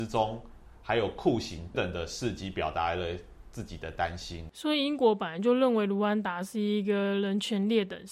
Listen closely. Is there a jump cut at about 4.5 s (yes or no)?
no